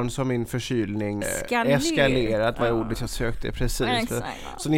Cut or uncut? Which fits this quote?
cut